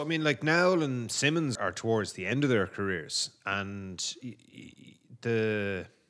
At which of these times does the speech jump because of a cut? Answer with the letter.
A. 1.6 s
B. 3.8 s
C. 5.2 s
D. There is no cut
A